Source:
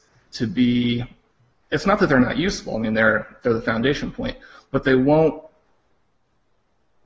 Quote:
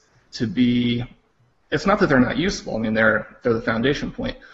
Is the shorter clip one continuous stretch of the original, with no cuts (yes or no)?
yes